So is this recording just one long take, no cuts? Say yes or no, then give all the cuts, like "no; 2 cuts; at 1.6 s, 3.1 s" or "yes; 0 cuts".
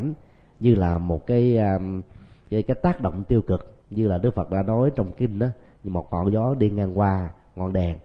no; 2 cuts; at 2.6 s, 3.8 s